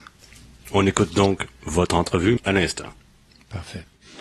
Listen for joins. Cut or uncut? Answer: cut